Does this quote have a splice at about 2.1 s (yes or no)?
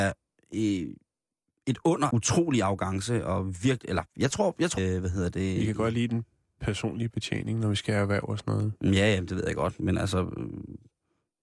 yes